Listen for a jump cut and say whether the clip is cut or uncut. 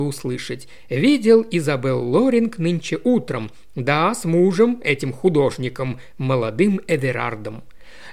uncut